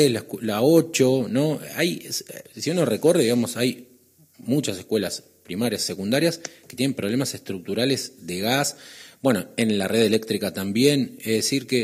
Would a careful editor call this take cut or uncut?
uncut